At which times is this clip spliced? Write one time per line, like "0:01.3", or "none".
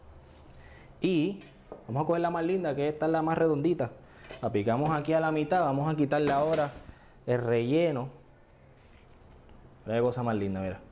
0:09.7